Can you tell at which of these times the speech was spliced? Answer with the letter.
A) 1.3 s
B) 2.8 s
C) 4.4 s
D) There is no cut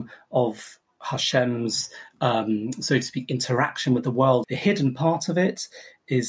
C